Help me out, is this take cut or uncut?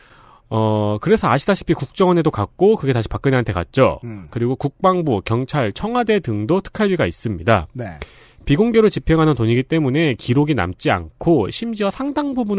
uncut